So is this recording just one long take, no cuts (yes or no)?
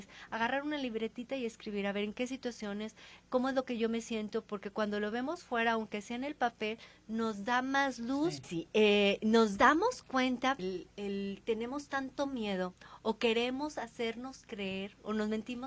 no